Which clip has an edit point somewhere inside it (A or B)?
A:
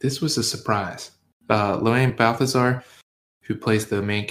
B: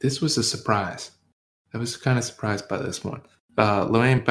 A